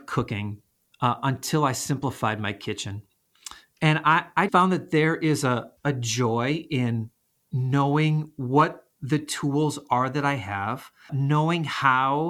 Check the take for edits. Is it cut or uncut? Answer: cut